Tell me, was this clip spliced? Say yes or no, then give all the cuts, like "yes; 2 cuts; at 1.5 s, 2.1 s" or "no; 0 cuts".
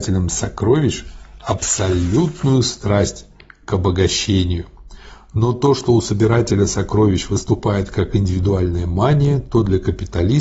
no; 0 cuts